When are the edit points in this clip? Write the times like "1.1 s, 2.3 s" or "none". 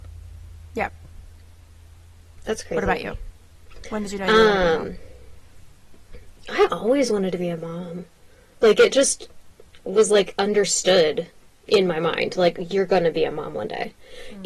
none